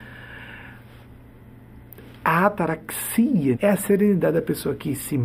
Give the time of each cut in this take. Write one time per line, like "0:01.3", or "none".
0:03.5